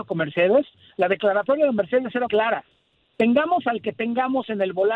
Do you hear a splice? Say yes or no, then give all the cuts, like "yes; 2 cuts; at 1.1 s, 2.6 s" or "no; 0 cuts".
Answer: yes; 1 cut; at 2.3 s